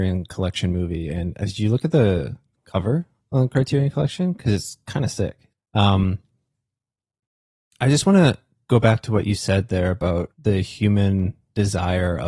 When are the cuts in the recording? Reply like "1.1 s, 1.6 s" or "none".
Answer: 5.5 s, 10.3 s